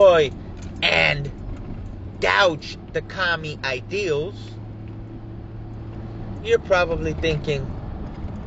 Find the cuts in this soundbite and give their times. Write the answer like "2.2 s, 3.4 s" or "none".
none